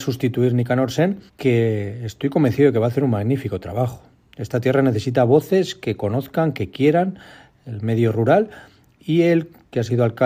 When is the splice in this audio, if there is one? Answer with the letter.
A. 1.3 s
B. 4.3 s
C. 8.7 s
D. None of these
A